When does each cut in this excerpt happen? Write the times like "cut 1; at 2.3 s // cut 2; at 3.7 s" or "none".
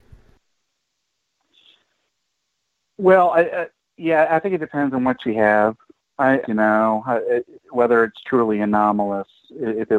cut 1; at 6.4 s